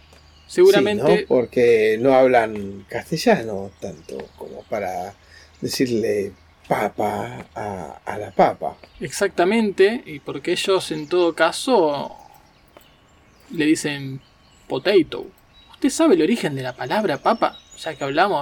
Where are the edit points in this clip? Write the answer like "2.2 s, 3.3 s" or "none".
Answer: none